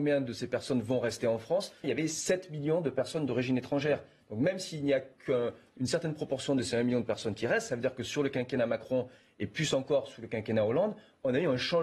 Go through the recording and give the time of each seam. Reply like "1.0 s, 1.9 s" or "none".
1.8 s